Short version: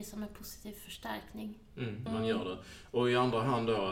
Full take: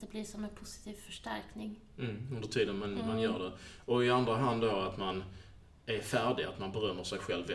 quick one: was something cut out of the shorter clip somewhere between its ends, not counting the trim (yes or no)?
yes